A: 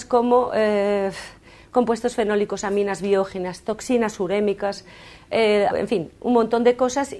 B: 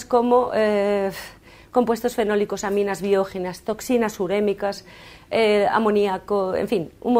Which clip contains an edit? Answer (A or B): A